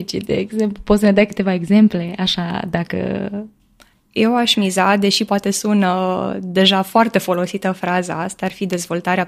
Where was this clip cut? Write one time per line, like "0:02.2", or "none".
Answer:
0:05.3

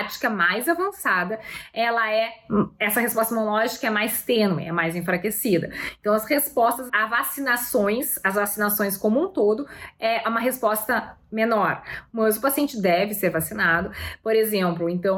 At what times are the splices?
0:06.9

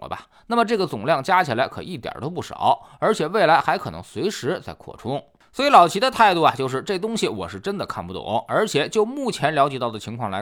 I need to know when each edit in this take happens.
none

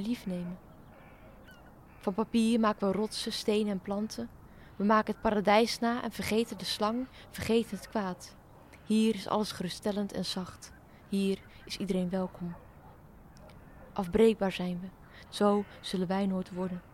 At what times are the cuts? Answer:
0:15.3

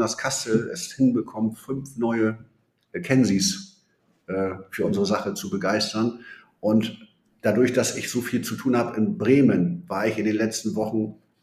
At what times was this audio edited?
none

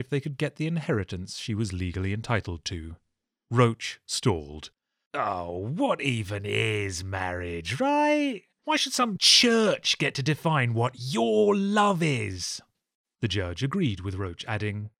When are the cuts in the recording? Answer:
none

